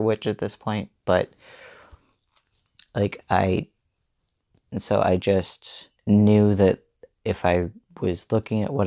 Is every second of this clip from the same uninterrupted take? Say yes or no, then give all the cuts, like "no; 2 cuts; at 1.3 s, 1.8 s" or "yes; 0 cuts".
no; 2 cuts; at 4.5 s, 6.0 s